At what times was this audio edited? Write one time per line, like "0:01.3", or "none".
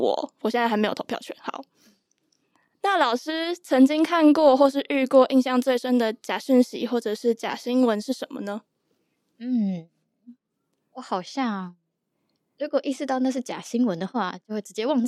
none